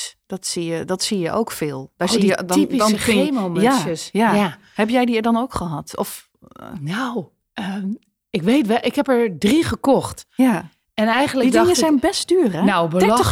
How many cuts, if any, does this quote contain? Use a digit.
1